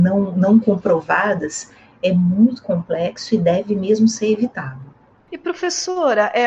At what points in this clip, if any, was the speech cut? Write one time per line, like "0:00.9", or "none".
none